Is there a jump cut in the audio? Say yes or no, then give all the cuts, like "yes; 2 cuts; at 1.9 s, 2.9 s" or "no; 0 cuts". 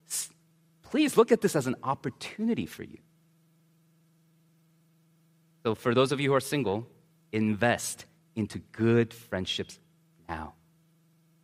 no; 0 cuts